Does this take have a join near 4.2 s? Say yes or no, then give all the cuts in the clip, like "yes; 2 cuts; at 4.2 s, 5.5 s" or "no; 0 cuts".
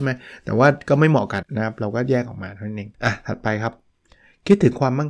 no; 2 cuts; at 1.4 s, 2.9 s